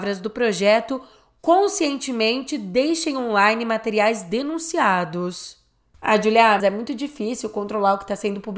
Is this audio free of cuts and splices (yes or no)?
no